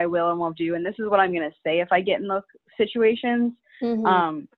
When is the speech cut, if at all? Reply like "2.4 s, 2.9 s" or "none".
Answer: none

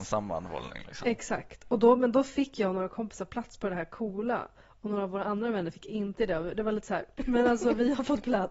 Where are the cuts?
7.2 s

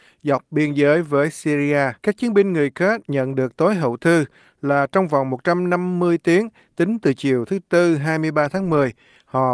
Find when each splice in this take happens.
2.0 s

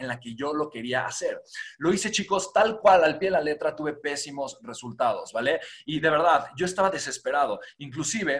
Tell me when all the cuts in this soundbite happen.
none

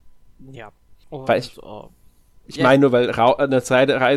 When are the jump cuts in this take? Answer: 1.0 s

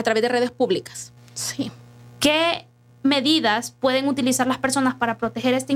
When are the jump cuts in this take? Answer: 1.2 s

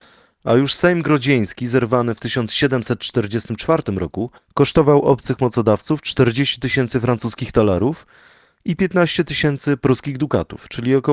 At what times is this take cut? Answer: none

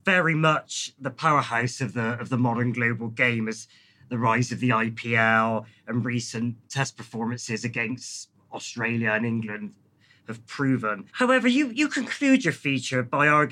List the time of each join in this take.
11.1 s

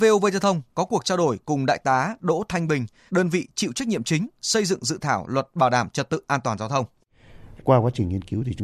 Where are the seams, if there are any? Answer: 3.1 s, 7.6 s

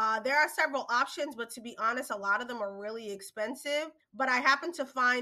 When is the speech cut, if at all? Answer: 4.0 s

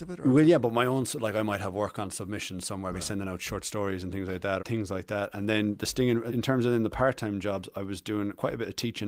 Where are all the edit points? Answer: 4.6 s, 6.3 s

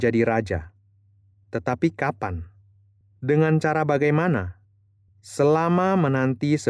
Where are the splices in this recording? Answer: none

